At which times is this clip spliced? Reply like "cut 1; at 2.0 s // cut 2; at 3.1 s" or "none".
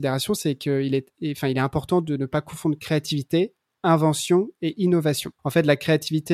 cut 1; at 5.4 s

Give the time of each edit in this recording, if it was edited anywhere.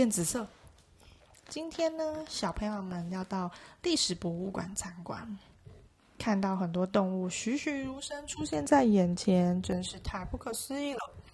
cut 1; at 1.3 s

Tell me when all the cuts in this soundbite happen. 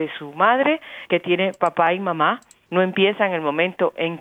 cut 1; at 1.1 s // cut 2; at 2.7 s

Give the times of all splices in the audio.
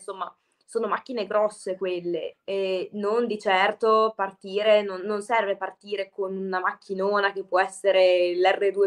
cut 1; at 2.3 s

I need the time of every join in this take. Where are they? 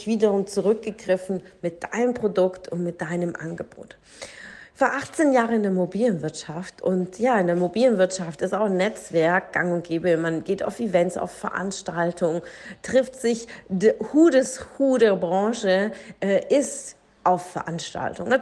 none

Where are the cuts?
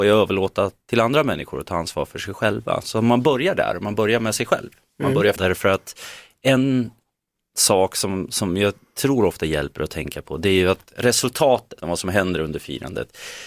cut 1; at 5.4 s // cut 2; at 11.8 s

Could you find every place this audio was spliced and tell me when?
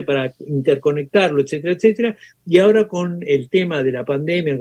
none

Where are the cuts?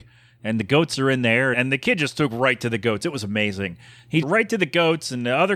cut 1; at 1.5 s // cut 2; at 4.2 s

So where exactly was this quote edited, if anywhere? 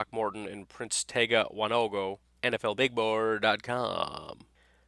cut 1; at 2.4 s

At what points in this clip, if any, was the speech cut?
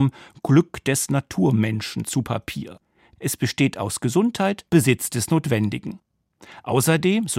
cut 1; at 3.2 s // cut 2; at 4.7 s

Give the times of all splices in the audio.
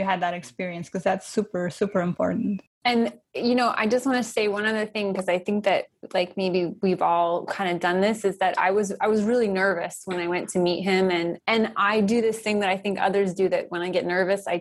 none

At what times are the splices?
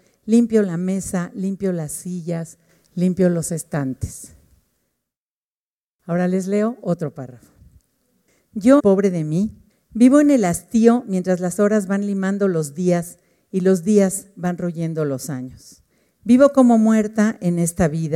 cut 1; at 8.8 s

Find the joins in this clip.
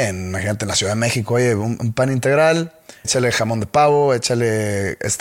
cut 1; at 3.0 s

